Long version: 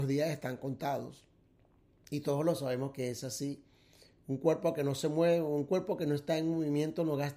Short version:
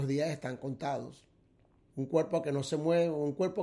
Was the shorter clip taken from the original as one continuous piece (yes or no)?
no